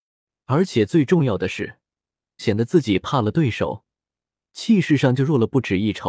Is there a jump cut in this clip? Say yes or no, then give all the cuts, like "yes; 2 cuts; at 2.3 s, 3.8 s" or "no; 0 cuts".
yes; 1 cut; at 2.4 s